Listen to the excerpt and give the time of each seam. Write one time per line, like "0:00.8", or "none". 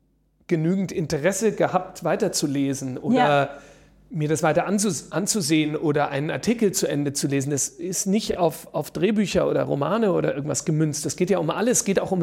none